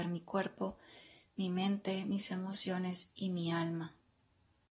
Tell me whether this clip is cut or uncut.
uncut